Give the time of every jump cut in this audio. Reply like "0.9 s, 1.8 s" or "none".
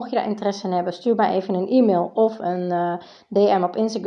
none